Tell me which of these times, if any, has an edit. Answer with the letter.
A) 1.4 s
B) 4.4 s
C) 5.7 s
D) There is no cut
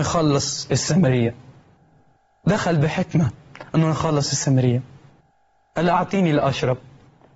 D